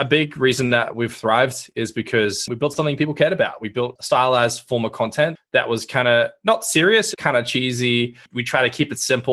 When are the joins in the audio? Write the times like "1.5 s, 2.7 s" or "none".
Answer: 7.1 s